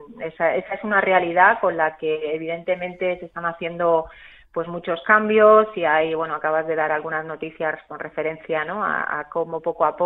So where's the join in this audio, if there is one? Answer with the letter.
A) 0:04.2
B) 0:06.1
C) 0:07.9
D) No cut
D